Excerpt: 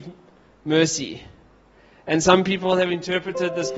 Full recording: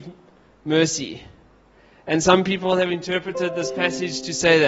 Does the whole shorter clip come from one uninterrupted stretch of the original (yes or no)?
yes